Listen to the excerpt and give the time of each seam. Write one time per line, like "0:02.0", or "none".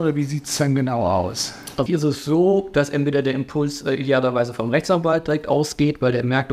0:01.9

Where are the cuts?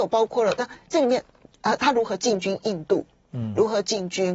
0:01.8

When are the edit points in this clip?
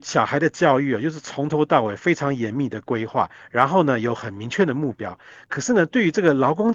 none

